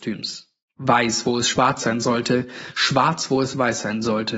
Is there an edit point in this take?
no; 0 cuts

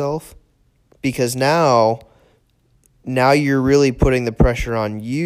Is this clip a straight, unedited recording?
yes; 0 cuts

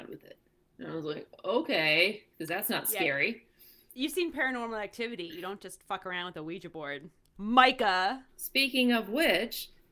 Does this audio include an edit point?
no; 0 cuts

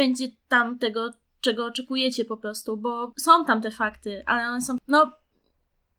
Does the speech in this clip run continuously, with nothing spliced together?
yes; 0 cuts

